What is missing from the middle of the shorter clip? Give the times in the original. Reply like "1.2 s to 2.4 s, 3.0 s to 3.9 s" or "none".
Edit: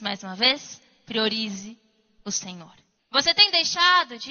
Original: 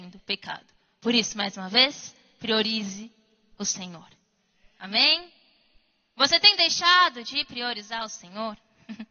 4.3 s to 6.0 s